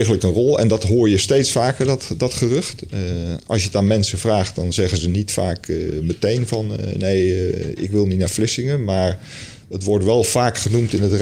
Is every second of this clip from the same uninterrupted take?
yes; 0 cuts

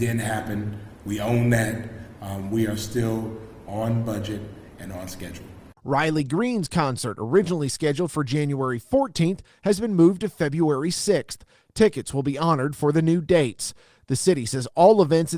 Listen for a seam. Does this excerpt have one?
yes; 2 cuts; at 2.2 s, 5.8 s

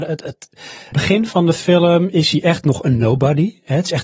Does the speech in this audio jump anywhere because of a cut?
yes; 1 cut; at 0.9 s

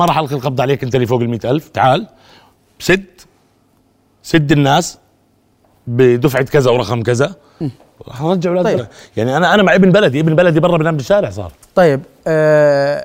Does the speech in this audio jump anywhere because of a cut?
yes; 1 cut; at 8.8 s

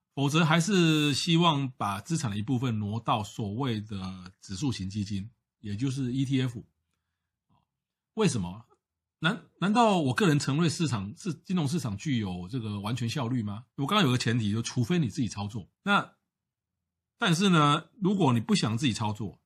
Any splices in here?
yes; 2 cuts; at 13.7 s, 15.7 s

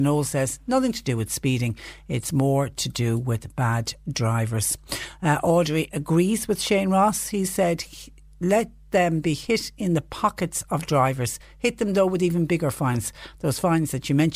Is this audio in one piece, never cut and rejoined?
yes; 0 cuts

